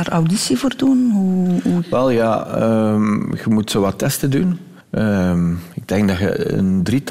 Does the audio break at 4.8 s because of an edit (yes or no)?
yes